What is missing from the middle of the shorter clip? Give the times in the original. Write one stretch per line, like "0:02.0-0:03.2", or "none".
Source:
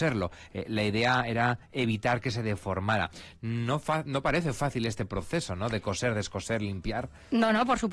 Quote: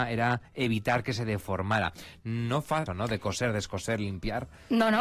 0:04.0-0:05.5